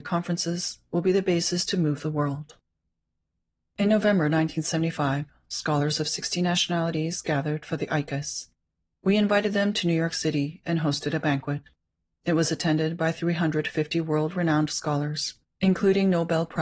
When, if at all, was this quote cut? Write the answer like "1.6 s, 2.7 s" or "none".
none